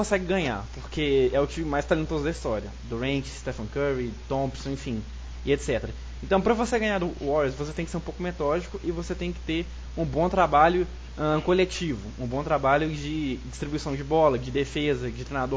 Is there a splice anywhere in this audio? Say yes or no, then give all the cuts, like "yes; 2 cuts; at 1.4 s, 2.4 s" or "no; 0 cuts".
no; 0 cuts